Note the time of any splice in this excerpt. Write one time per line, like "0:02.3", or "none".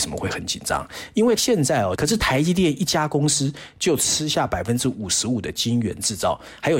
0:02.0